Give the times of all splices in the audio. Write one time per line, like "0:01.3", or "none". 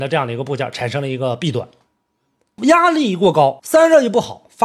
0:02.6
0:03.6

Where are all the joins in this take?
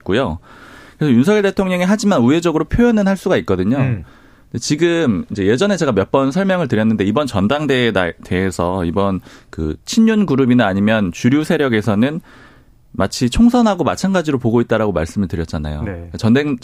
none

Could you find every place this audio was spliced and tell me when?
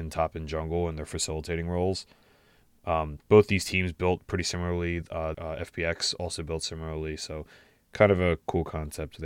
0:05.3

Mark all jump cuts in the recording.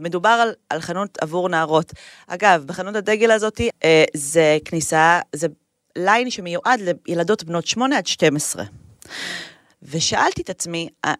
0:03.7
0:09.7

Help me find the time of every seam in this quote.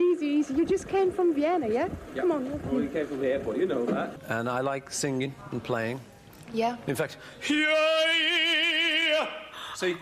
none

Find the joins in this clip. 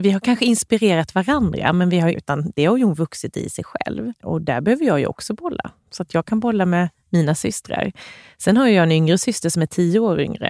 0:02.1
0:04.1

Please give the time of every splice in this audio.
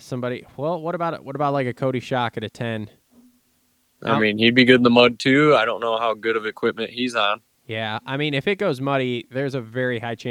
none

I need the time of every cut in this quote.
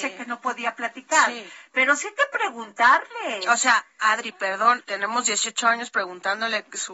0:04.8

